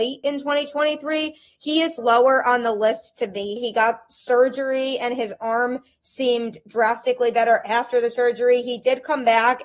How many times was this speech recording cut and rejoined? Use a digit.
2